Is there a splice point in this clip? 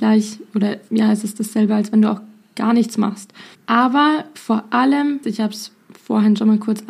yes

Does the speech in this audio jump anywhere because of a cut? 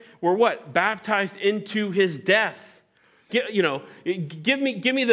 yes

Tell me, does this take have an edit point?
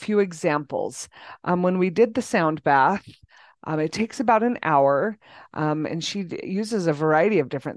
no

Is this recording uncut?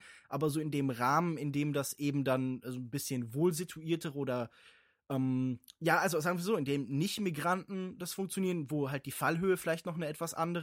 yes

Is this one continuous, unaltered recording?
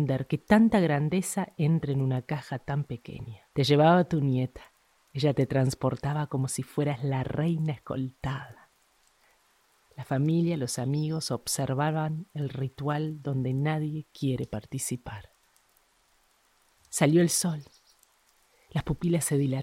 no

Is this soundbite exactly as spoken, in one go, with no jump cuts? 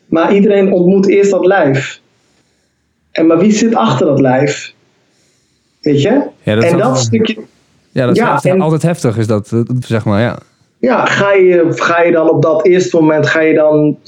no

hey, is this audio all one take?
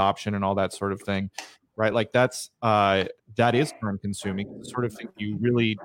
yes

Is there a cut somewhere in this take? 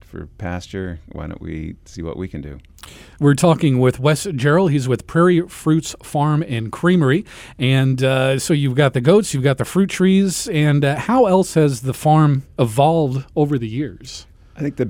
no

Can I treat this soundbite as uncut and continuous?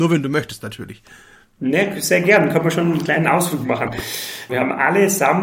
no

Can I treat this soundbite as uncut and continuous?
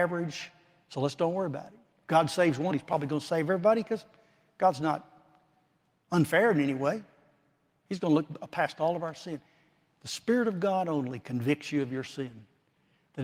no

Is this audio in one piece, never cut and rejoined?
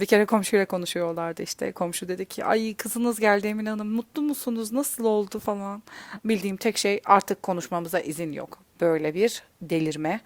no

